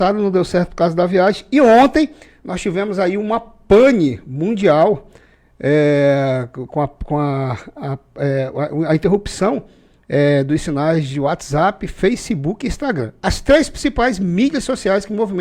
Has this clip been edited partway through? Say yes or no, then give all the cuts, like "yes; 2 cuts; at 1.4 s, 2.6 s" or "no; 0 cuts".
no; 0 cuts